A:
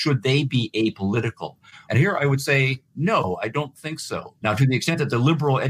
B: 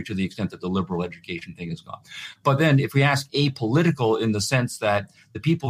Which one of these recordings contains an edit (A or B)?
A